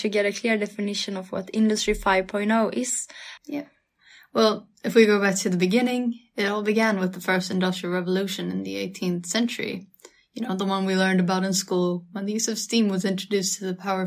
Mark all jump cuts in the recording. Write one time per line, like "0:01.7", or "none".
0:03.4